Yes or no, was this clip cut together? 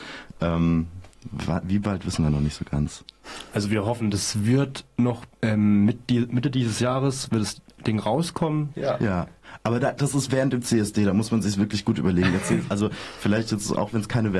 yes